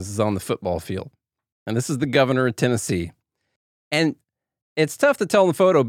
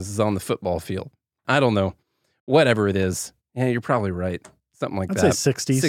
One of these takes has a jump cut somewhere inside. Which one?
second; 1 cut; at 1.4 s

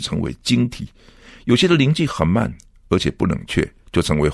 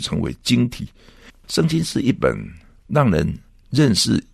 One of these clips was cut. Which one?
second; 1 cut; at 1.3 s

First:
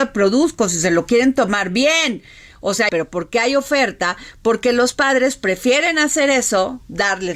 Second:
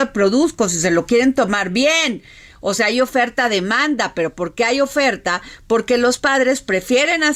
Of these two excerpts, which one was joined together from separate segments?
first; 1 cut; at 2.9 s

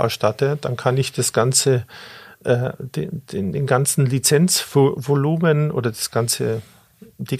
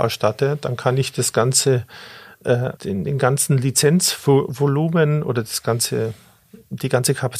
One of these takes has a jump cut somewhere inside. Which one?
second; 1 cut; at 2.8 s

